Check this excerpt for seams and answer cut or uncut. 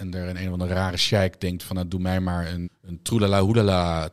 cut